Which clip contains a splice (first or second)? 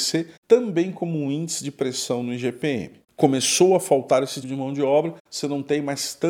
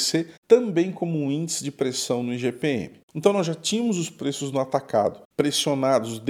first